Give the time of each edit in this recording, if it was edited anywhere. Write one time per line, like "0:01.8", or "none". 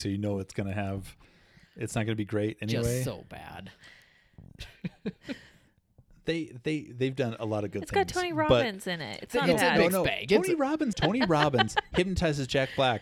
0:10.9